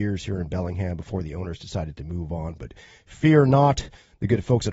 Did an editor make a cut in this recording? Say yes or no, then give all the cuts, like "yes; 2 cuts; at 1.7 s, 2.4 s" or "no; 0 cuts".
no; 0 cuts